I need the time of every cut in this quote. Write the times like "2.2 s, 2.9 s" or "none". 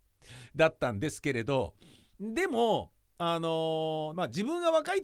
4.1 s